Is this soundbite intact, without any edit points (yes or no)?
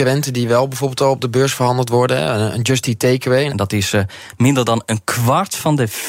no